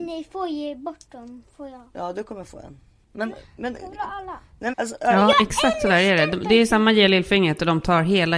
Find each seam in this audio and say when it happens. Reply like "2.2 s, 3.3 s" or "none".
4.7 s